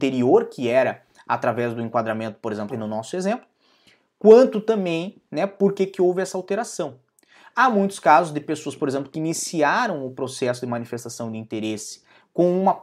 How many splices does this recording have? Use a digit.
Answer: 1